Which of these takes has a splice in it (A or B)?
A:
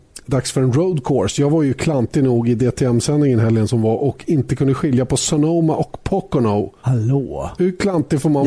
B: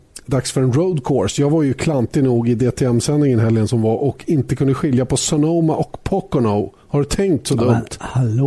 A